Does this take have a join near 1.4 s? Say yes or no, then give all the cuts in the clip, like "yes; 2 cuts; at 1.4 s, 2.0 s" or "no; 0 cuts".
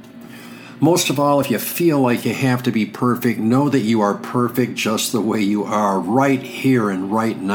no; 0 cuts